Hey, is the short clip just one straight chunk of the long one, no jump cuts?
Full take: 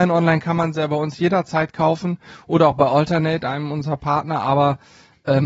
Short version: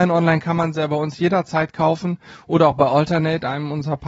yes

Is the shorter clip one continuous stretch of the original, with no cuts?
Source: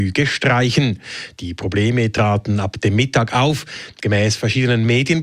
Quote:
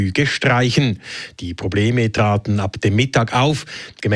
yes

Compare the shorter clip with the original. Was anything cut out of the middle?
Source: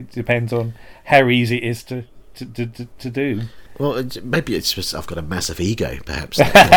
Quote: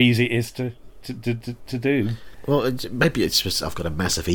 no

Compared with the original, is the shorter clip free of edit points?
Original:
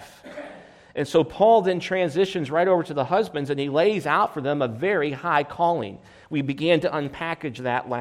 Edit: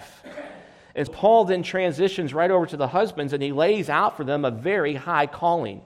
no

